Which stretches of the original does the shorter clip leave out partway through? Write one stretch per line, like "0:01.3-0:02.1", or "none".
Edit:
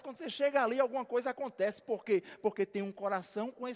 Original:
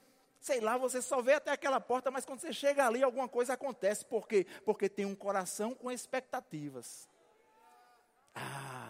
none

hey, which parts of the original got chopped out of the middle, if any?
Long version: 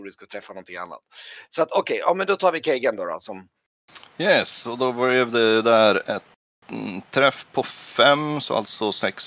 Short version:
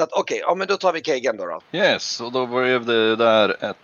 0:03.2-0:04.1

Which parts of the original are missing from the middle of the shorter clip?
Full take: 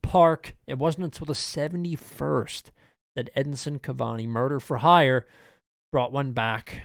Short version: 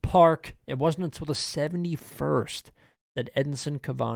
none

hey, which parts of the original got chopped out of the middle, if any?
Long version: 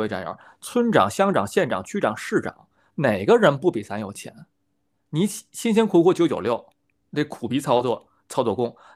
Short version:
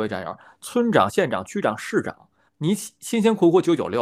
0:01.1-0:01.5
0:02.9-0:05.0

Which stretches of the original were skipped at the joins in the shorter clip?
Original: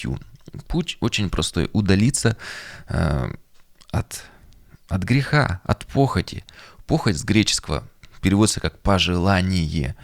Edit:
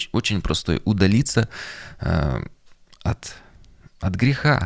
none

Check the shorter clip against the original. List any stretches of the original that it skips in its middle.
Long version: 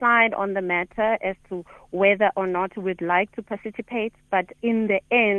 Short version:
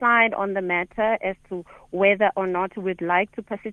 none

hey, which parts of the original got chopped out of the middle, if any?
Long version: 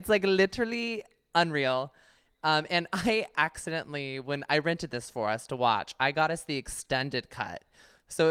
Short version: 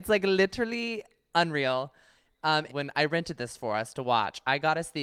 0:02.7-0:04.2

